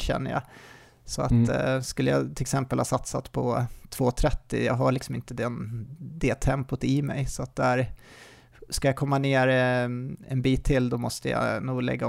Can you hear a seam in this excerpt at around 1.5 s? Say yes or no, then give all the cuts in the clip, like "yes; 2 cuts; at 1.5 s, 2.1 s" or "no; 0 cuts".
no; 0 cuts